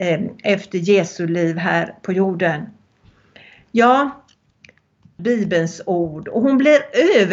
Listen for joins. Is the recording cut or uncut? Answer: cut